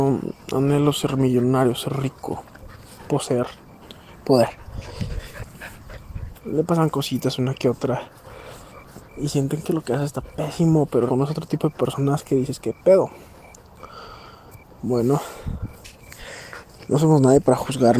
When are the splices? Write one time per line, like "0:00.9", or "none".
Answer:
0:06.3
0:11.1